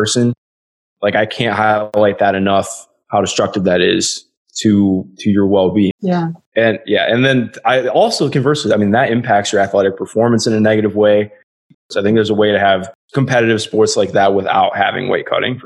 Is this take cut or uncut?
cut